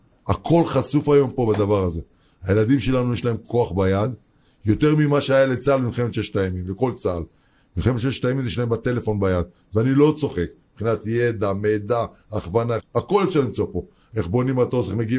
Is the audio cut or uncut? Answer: cut